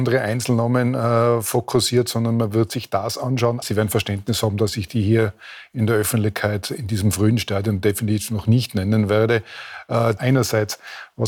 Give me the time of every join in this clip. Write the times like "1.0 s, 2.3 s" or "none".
3.6 s, 10.2 s